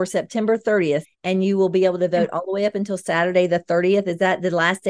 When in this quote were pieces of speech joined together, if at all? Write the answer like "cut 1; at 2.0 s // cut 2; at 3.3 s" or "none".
cut 1; at 1.0 s